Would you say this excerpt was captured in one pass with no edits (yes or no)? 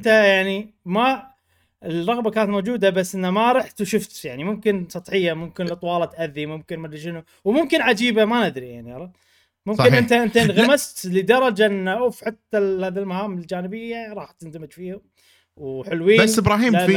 yes